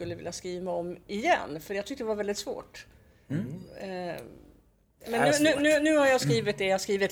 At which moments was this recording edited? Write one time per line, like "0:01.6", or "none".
none